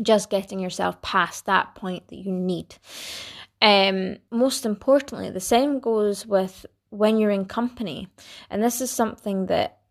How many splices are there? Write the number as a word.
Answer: one